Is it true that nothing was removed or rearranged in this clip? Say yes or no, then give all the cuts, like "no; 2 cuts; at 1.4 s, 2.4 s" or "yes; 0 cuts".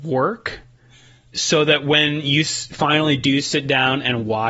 no; 1 cut; at 1.3 s